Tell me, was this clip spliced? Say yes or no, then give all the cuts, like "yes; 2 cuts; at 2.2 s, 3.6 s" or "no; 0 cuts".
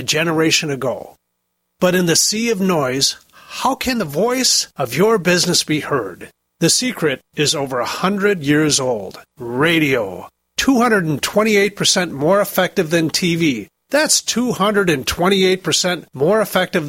no; 0 cuts